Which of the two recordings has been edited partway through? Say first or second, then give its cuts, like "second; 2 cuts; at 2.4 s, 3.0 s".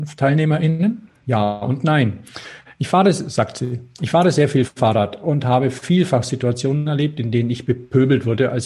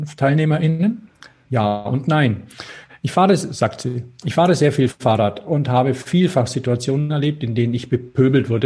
first; 1 cut; at 1.2 s